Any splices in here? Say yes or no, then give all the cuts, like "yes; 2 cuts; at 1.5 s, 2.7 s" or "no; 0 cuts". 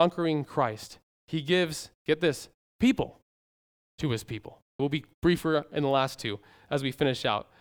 yes; 1 cut; at 4.8 s